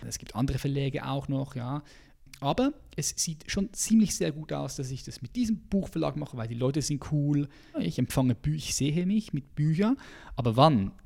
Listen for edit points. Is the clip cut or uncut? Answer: cut